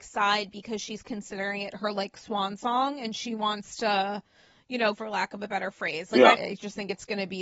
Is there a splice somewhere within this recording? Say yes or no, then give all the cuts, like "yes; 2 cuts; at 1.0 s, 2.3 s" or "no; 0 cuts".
yes; 2 cuts; at 4.9 s, 6.3 s